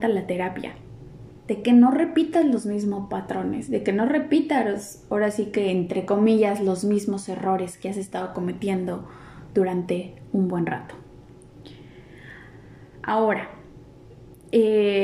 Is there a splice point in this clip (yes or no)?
yes